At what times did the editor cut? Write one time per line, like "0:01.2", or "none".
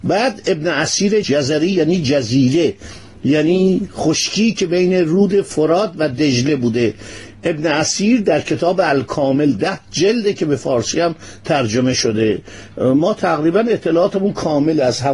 0:01.2